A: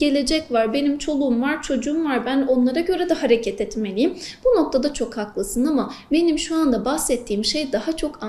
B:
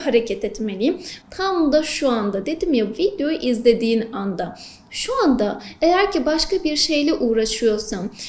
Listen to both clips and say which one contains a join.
B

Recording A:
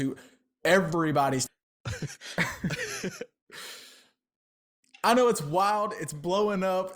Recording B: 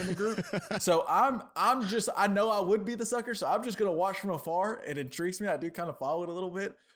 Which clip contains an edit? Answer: A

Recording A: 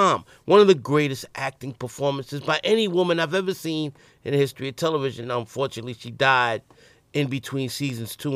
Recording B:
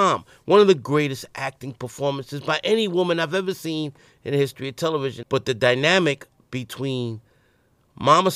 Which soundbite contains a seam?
B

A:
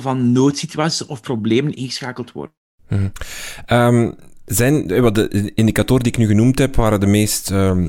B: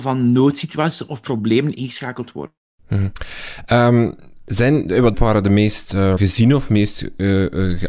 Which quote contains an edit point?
B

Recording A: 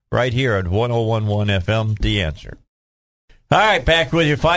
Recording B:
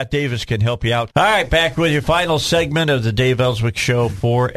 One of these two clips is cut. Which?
B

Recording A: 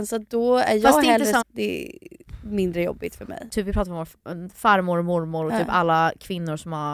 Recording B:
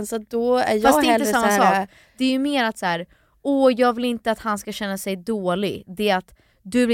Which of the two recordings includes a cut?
A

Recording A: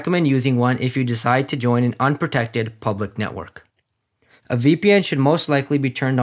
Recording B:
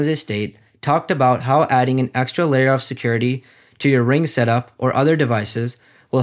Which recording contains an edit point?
A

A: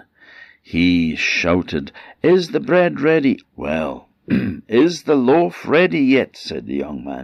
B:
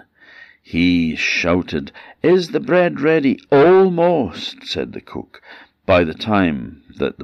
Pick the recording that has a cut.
A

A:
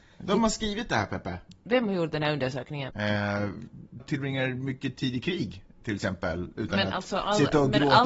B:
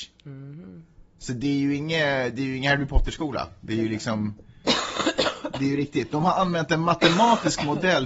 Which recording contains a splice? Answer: A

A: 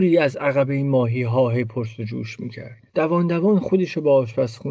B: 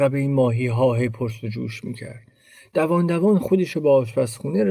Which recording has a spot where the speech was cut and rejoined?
A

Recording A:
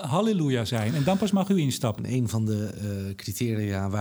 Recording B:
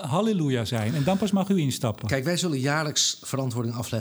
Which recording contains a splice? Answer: A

